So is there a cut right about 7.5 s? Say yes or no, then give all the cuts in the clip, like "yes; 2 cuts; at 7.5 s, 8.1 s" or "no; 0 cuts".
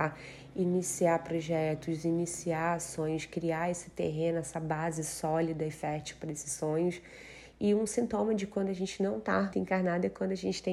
yes; 2 cuts; at 7.5 s, 9.5 s